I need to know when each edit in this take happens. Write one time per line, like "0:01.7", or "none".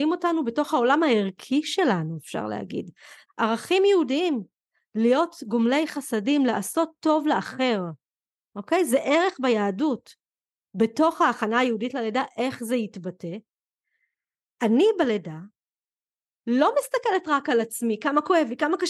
0:03.3